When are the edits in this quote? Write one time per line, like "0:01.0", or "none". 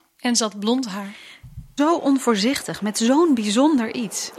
0:01.8